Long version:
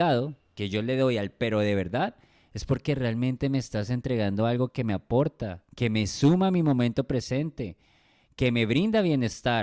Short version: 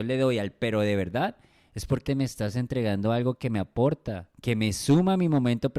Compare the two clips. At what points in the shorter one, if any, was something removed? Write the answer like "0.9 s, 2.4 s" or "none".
2.1 s